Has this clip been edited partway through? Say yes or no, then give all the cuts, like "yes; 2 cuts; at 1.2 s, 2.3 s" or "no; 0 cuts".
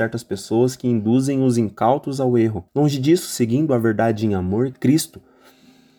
yes; 2 cuts; at 2.7 s, 4.7 s